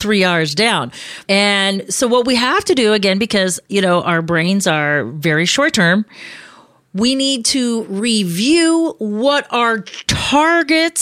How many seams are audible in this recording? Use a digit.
1